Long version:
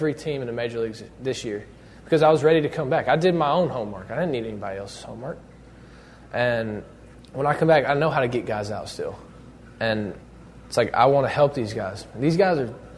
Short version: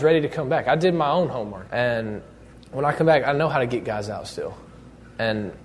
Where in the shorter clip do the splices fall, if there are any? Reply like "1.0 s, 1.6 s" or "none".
1.7 s